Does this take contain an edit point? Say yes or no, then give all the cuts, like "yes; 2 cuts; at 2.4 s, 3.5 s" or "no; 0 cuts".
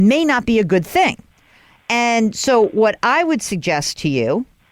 no; 0 cuts